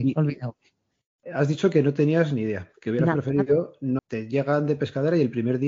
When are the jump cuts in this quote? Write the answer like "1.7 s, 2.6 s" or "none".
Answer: 4.0 s